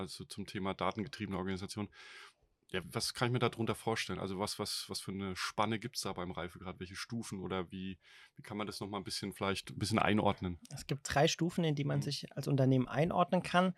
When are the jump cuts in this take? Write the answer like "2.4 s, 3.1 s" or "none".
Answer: 2.8 s